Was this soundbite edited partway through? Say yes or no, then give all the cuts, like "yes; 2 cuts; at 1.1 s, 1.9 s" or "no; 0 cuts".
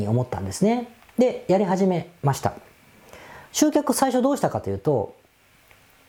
no; 0 cuts